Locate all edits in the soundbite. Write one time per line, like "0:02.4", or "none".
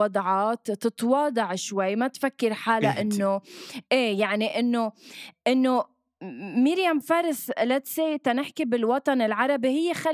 none